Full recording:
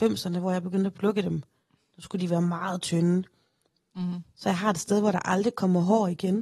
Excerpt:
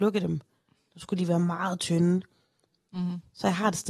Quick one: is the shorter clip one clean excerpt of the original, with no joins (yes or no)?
yes